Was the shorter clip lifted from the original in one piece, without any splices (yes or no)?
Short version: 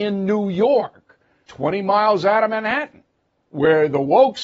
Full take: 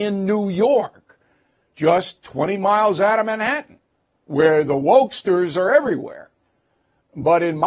no